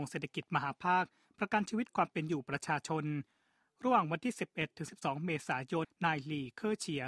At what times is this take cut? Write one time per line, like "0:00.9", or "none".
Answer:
0:05.8

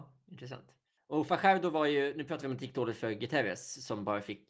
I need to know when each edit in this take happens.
none

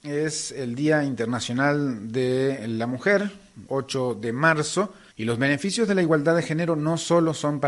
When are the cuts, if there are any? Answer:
0:03.7
0:05.1

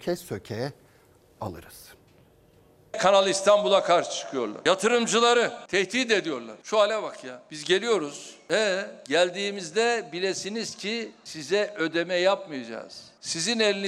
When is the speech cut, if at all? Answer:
none

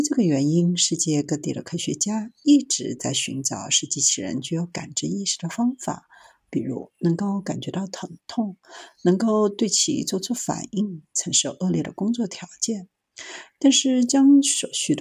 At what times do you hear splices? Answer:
none

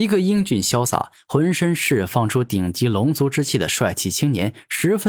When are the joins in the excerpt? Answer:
none

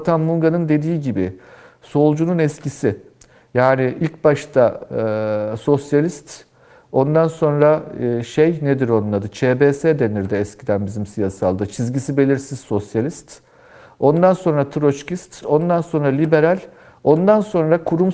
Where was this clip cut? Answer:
0:15.4

